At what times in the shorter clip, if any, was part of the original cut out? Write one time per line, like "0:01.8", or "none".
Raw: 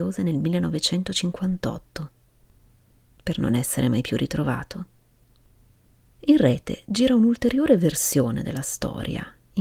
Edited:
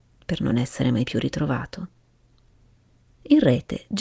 none